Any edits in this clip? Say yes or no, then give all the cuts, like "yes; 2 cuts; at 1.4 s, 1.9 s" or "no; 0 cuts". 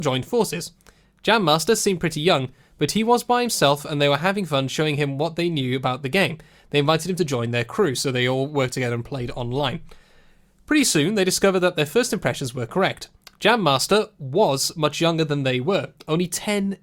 no; 0 cuts